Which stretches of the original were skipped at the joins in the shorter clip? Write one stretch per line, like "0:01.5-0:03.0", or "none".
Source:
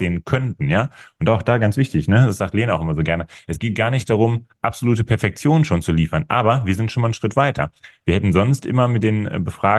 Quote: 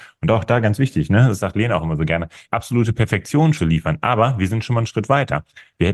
0:03.4-0:04.6
0:05.7-0:05.8